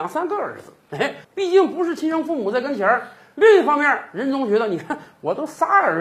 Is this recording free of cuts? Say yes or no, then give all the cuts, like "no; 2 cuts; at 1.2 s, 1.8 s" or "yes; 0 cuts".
no; 1 cut; at 1.2 s